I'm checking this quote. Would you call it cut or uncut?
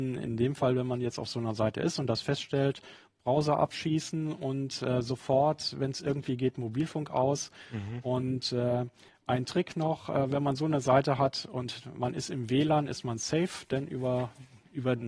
uncut